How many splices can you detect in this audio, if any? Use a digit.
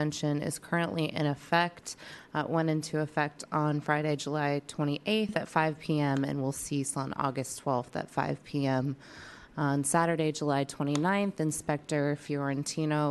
0